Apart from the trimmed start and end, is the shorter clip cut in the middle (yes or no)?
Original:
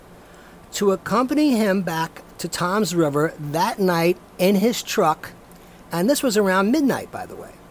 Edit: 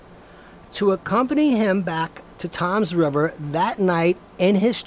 no